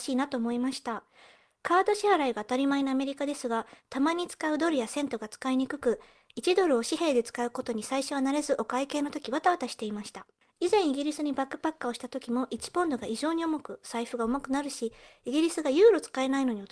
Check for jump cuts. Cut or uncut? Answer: uncut